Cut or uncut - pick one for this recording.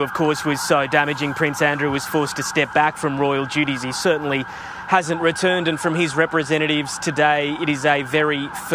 uncut